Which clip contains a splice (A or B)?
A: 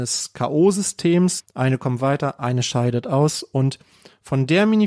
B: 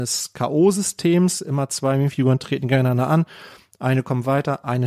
A